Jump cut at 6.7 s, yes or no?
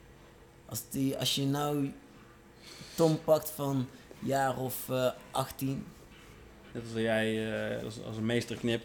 yes